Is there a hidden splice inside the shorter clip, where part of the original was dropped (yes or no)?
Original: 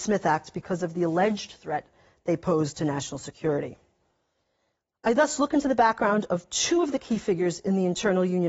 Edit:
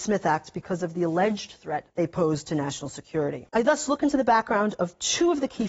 yes